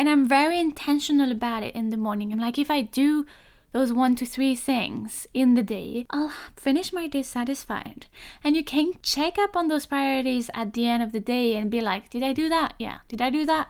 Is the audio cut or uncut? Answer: uncut